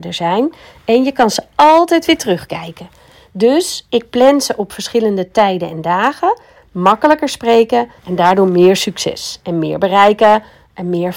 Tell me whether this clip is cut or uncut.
cut